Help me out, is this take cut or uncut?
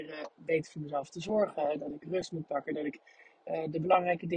uncut